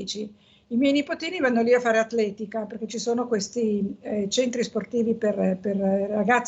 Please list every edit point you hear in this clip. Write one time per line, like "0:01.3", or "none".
none